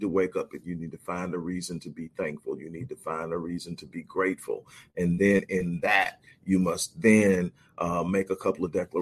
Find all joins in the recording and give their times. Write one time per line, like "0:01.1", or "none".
none

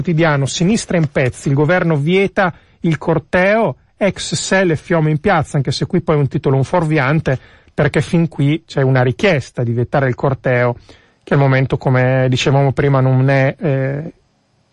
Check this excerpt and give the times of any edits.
none

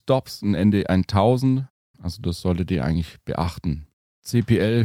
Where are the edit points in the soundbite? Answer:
0:01.9

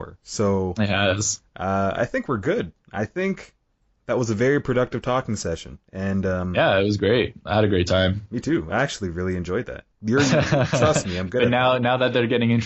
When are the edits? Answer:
0:09.9

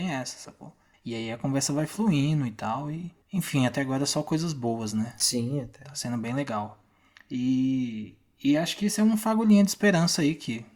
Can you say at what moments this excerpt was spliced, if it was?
none

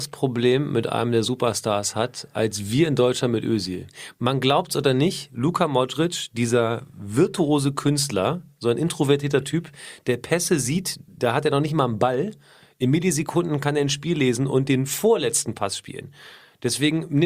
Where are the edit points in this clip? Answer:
none

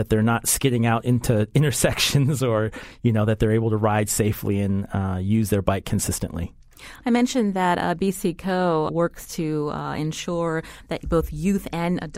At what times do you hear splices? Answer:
0:08.9

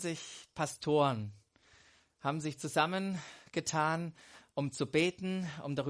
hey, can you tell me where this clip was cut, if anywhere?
none

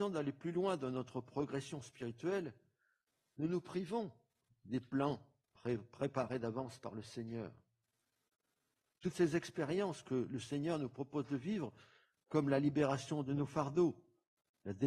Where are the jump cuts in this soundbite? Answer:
none

